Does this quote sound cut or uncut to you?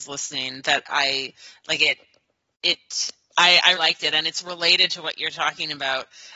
cut